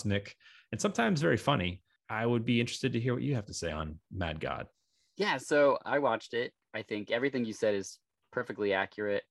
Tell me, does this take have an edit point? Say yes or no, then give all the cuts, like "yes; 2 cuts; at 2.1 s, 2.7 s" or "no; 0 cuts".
yes; 1 cut; at 6.7 s